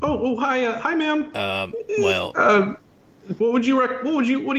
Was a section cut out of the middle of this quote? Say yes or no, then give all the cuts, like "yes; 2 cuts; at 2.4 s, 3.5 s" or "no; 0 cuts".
yes; 2 cuts; at 1.3 s, 3.4 s